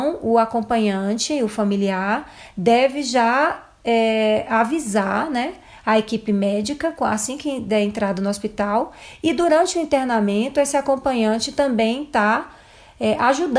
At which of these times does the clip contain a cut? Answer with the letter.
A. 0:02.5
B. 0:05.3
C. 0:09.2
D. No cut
D